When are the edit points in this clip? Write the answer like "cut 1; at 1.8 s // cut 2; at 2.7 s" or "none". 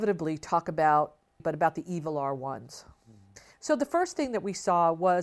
cut 1; at 1.4 s // cut 2; at 3.5 s

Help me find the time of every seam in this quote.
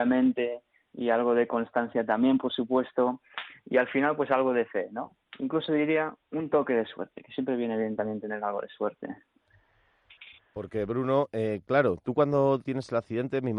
cut 1; at 12.6 s

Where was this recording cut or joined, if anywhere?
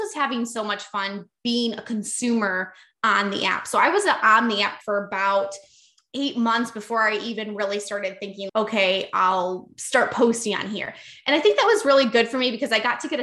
cut 1; at 8.5 s

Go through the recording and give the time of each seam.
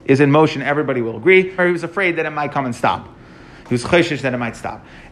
cut 1; at 1.6 s

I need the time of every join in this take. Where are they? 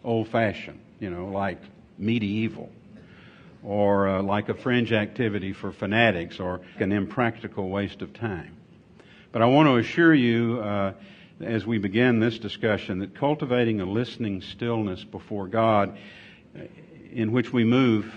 cut 1; at 6.7 s

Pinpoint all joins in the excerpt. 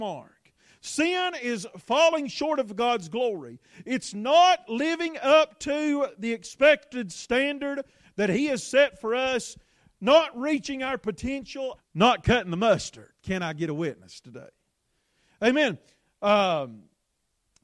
cut 1; at 11.8 s

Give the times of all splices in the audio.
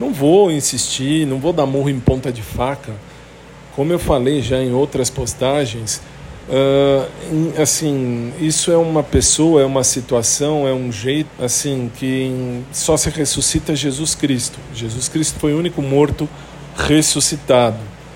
cut 1; at 11.3 s

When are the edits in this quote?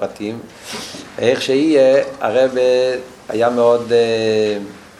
none

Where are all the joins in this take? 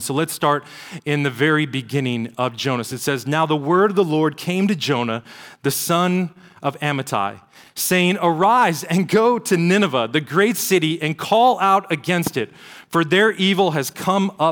cut 1; at 2.8 s

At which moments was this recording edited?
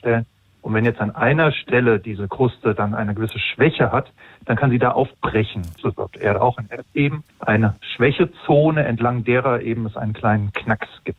cut 1; at 5.8 s // cut 2; at 7.3 s

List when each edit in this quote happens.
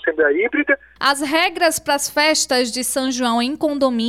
cut 1; at 1.0 s

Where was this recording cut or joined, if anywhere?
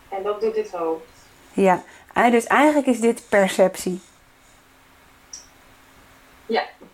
none

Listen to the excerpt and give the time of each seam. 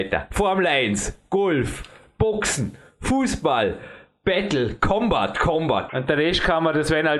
cut 1; at 5.9 s

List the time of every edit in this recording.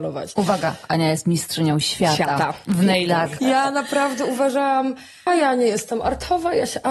cut 1; at 3.4 s // cut 2; at 5.3 s

